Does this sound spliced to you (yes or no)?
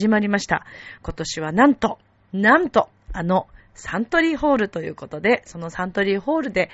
yes